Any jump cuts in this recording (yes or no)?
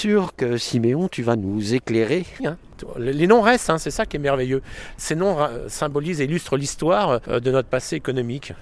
yes